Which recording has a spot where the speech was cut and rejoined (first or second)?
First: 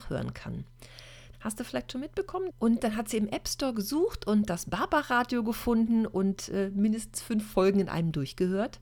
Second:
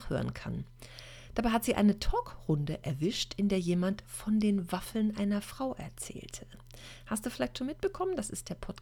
first